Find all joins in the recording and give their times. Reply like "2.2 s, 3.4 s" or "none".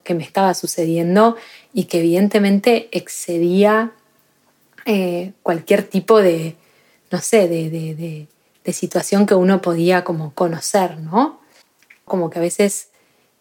12.1 s